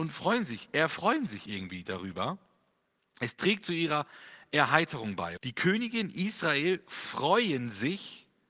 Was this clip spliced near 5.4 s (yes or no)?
yes